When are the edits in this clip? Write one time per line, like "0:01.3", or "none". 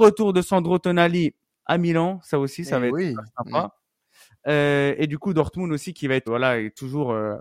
0:06.3